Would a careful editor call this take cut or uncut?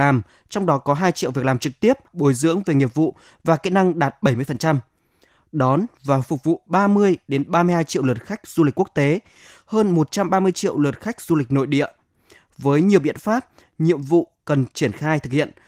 cut